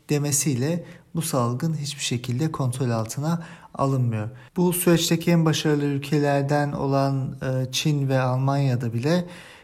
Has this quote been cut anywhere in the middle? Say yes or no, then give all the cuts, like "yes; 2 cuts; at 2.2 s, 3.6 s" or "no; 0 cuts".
yes; 1 cut; at 4.5 s